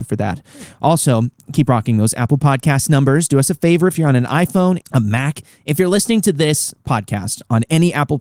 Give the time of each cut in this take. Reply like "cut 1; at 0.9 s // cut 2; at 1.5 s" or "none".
cut 1; at 4.8 s